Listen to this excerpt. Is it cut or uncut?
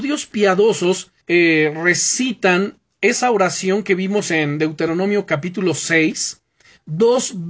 cut